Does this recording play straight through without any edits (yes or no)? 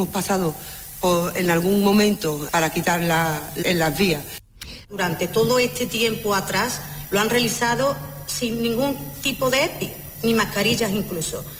no